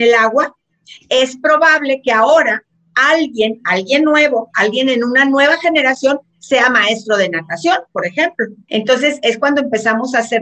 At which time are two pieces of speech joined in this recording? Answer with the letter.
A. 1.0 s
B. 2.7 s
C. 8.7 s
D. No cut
C